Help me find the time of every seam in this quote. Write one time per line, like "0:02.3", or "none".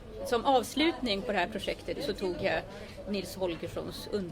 0:02.0